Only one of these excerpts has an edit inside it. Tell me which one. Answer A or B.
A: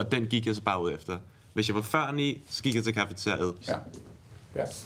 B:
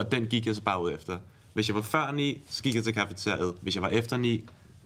A